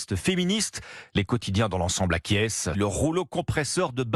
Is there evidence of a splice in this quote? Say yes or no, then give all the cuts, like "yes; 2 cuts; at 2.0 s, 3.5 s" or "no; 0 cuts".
yes; 1 cut; at 2.7 s